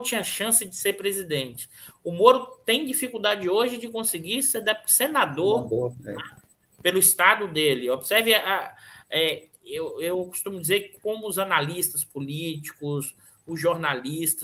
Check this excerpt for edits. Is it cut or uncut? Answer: uncut